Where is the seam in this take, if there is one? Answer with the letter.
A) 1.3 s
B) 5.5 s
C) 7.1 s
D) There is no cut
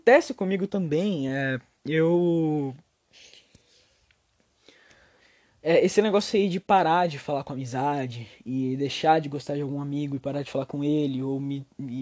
D